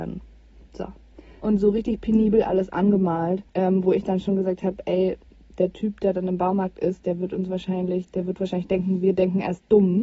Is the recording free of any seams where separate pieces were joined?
no; 2 cuts; at 1.4 s, 3.5 s

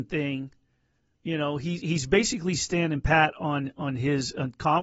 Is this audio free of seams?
yes; 0 cuts

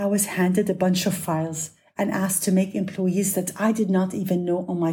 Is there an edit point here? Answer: no; 0 cuts

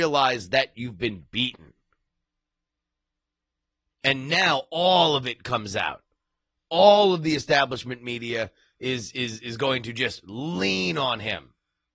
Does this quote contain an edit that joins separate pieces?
no; 0 cuts

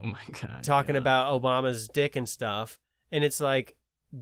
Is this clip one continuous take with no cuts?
yes; 0 cuts

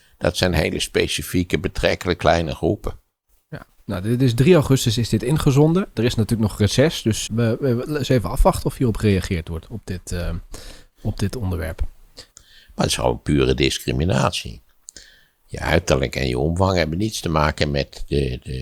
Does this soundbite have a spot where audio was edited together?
yes; 2 cuts; at 7.3 s, 12.3 s

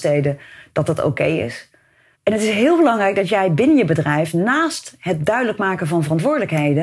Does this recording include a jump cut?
yes; 1 cut; at 2.1 s

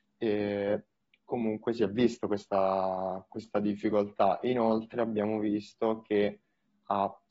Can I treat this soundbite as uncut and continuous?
yes; 0 cuts

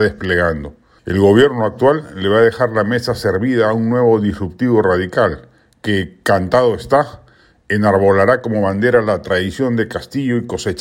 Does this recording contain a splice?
yes; 1 cut; at 1.0 s

